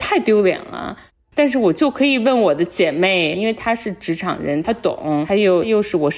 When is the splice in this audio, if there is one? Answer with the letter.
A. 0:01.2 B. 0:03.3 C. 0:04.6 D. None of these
C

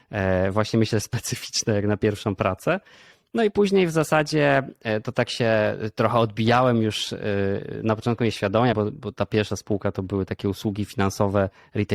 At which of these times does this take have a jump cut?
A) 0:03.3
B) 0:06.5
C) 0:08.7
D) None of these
C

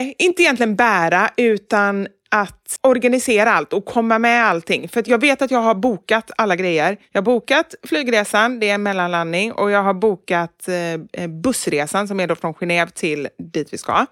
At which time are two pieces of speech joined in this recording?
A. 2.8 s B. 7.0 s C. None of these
A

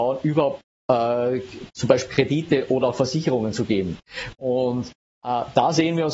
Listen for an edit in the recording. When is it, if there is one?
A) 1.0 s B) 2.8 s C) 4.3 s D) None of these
D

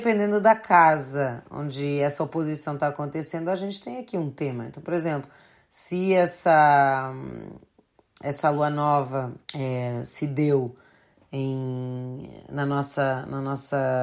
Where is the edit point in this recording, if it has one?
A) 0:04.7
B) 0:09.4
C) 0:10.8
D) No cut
B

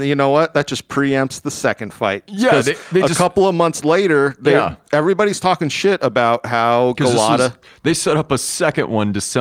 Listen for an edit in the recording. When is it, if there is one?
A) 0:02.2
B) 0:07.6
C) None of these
B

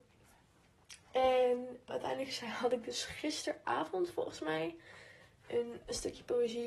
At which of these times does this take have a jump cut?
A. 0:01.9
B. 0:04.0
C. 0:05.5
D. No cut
A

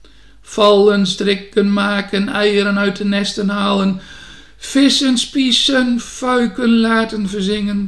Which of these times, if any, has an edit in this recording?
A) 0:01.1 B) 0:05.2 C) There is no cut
A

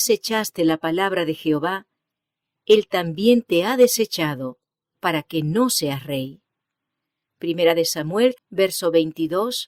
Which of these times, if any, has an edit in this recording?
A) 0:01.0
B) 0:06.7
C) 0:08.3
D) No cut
C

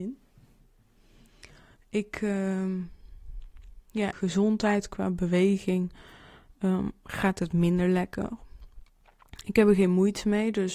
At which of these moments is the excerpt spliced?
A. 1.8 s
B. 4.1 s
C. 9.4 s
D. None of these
B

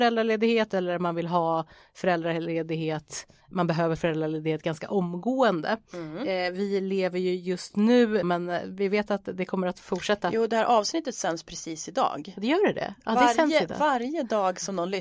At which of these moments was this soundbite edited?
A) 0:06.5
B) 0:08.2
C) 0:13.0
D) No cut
B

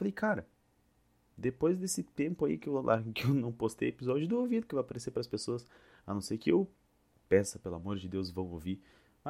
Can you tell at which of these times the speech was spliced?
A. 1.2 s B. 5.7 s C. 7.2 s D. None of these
C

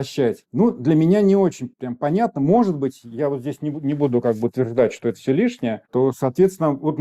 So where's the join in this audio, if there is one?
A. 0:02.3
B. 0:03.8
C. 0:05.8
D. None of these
C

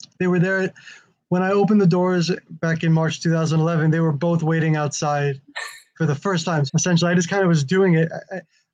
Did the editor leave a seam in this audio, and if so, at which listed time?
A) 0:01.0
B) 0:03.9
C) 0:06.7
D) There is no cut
C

